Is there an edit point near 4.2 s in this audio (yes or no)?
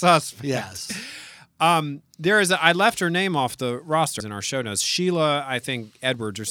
yes